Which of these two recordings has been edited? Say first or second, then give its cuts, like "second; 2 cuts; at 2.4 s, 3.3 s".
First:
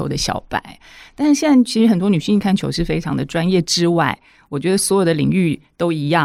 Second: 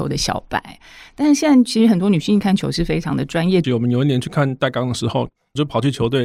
second; 1 cut; at 3.6 s